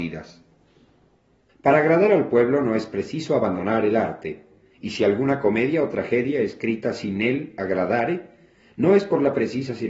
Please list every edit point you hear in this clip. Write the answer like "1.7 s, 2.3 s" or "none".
1.5 s